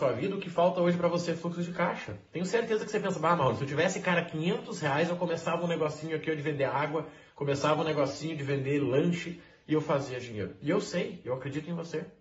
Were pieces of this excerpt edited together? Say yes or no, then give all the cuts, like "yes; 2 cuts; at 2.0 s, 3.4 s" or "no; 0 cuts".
no; 0 cuts